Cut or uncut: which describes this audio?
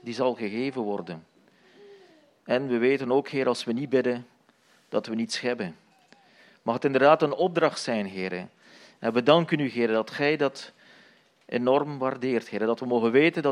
uncut